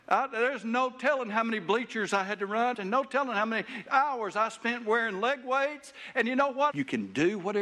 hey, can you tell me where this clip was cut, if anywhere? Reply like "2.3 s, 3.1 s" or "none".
2.7 s, 6.7 s